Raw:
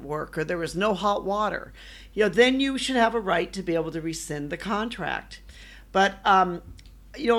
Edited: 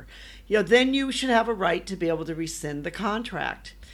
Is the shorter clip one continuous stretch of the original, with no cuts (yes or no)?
yes